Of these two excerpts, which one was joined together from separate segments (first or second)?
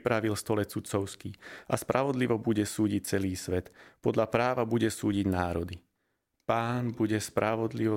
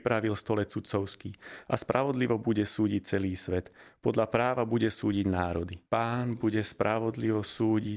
second